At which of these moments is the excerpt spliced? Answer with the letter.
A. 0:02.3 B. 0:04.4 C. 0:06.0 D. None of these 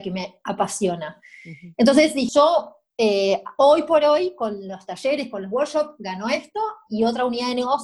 A